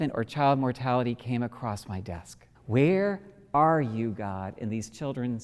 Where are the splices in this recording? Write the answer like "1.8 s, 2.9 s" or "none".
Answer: 2.5 s